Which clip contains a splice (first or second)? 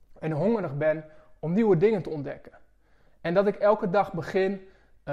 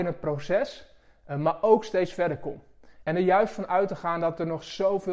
second